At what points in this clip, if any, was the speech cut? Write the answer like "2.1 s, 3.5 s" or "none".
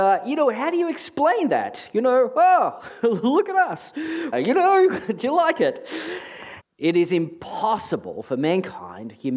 4.3 s, 6.6 s